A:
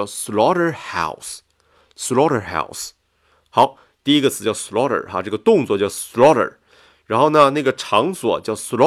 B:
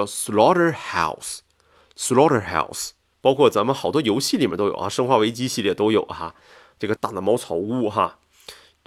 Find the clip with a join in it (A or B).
B